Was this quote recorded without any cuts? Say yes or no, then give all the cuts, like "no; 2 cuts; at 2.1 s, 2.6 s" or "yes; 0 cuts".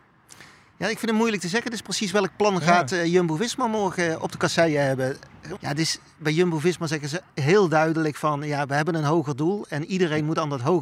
no; 1 cut; at 5.6 s